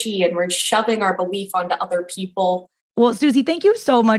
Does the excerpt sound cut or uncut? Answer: cut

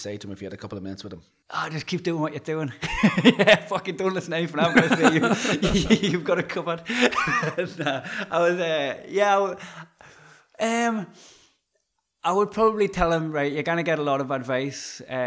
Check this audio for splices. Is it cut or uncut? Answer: uncut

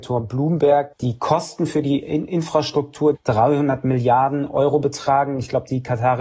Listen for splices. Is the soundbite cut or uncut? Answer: cut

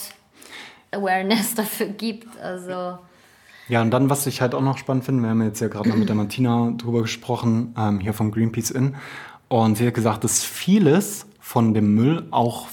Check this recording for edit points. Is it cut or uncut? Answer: uncut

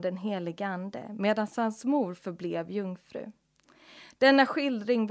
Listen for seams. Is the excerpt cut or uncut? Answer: uncut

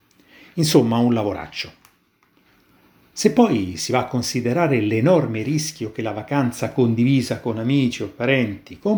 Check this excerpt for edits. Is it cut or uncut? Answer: uncut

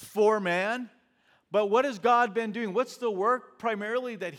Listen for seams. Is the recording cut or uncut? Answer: uncut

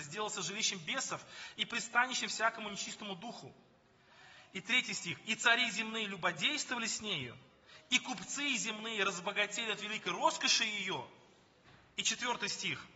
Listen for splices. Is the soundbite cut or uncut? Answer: uncut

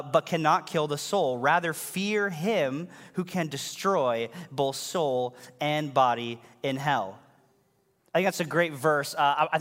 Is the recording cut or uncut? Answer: uncut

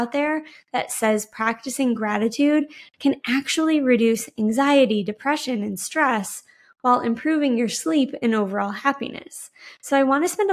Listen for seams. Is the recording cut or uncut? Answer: uncut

